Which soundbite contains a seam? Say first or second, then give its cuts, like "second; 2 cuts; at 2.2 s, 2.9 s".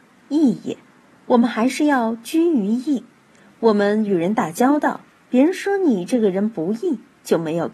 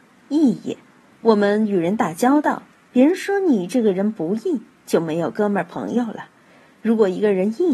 second; 1 cut; at 1.1 s